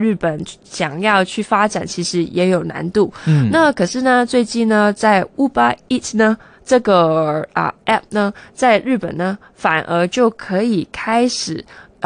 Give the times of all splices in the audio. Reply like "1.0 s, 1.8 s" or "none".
none